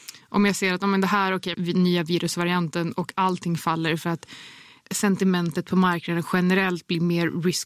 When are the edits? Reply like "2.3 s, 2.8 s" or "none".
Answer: 1.5 s